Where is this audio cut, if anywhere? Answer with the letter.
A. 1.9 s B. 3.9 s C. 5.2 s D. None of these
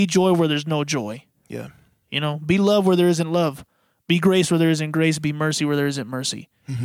D